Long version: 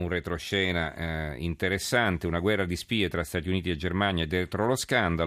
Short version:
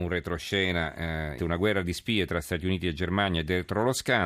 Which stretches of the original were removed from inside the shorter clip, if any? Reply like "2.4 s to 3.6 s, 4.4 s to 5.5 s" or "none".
1.4 s to 2.2 s